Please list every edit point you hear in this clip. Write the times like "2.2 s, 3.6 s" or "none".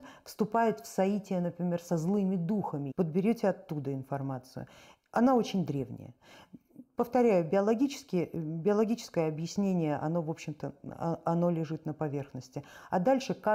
2.9 s

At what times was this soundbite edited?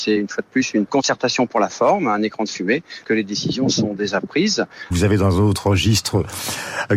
3.0 s, 4.9 s

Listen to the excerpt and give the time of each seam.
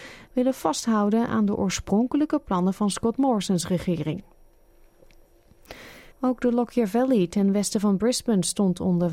6.1 s

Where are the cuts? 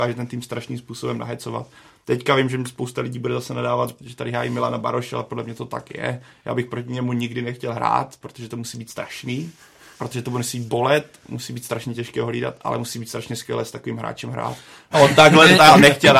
9.9 s, 14.9 s

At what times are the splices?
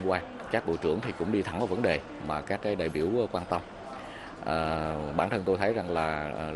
none

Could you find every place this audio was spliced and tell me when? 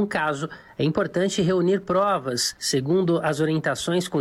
none

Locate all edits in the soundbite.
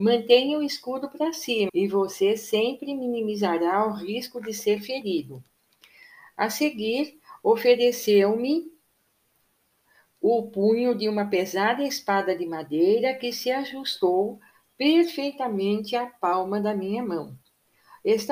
1.7 s

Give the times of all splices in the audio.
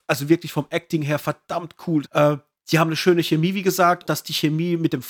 2.0 s, 4.0 s

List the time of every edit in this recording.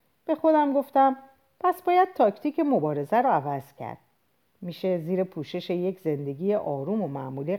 none

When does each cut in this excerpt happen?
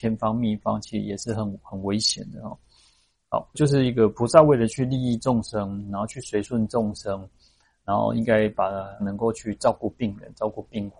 3.5 s, 9.0 s

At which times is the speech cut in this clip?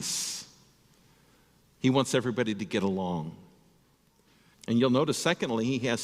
4.5 s

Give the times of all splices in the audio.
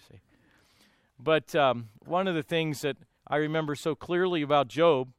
none

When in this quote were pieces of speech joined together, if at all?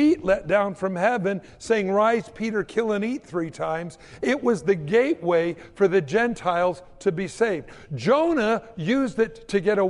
none

